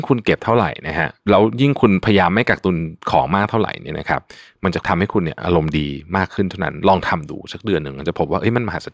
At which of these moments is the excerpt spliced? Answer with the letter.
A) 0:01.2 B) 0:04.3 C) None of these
A